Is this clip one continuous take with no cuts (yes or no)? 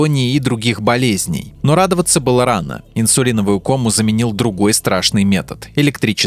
no